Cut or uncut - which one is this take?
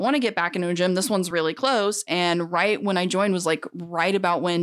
uncut